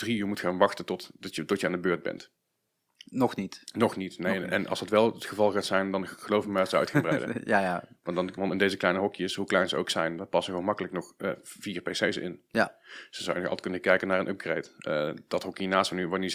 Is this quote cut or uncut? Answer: cut